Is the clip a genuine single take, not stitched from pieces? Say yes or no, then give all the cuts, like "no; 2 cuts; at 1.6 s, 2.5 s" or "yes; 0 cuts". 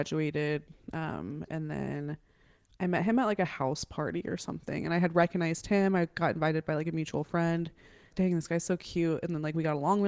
no; 1 cut; at 8.1 s